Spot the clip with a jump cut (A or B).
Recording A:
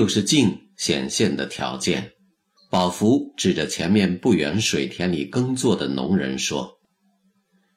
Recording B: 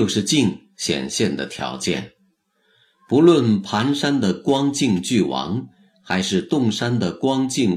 A